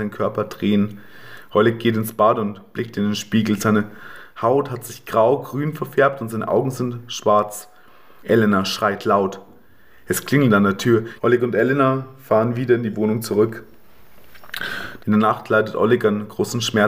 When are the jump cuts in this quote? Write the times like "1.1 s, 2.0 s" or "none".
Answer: 8.2 s, 11.2 s, 15.0 s